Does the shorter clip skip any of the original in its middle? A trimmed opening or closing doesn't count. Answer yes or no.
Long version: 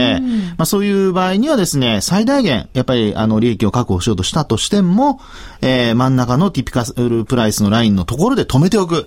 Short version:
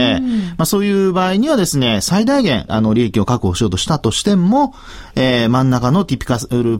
yes